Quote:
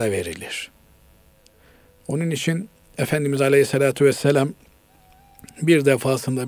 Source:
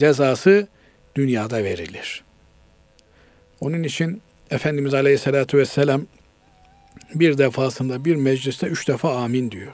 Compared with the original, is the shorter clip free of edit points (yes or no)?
yes